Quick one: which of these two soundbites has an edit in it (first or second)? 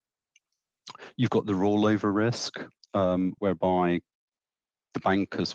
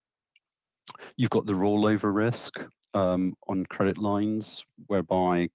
first